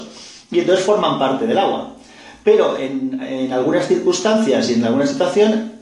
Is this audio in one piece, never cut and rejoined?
yes; 0 cuts

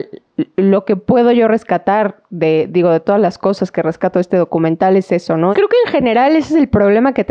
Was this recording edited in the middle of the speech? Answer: yes; 1 cut; at 5.5 s

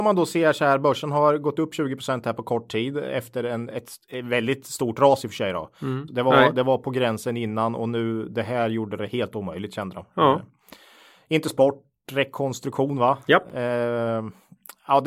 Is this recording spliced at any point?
yes; 1 cut; at 6.1 s

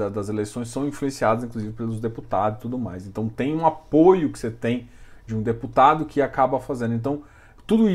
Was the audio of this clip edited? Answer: no; 0 cuts

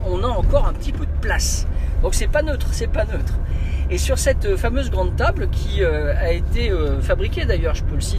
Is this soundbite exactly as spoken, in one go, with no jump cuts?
yes; 0 cuts

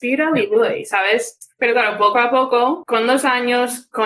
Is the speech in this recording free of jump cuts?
no; 1 cut; at 1.5 s

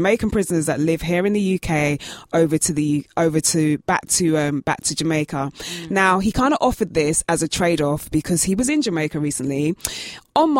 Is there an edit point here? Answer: no; 0 cuts

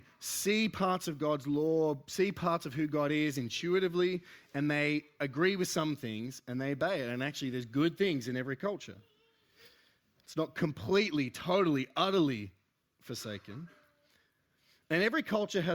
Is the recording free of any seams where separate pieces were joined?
yes; 0 cuts

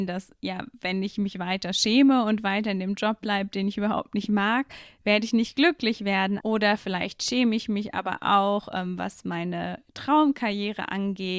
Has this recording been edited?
yes; 1 cut; at 6.4 s

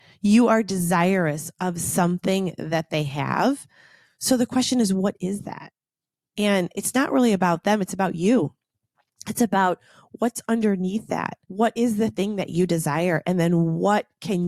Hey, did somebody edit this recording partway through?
yes; 1 cut; at 11.4 s

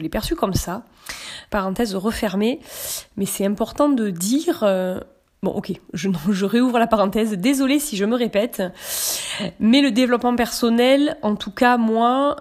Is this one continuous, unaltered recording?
no; 1 cut; at 1.5 s

